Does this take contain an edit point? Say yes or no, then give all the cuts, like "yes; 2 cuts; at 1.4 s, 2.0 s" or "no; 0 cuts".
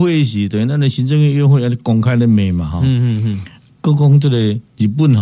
no; 0 cuts